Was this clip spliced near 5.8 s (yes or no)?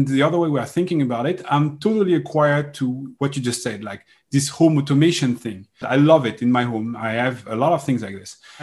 yes